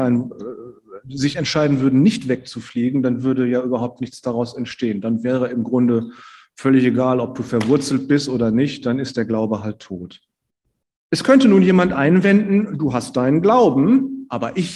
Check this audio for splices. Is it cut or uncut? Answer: uncut